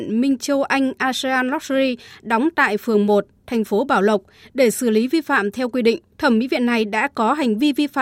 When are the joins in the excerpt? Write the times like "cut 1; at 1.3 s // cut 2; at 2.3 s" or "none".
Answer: cut 1; at 6.1 s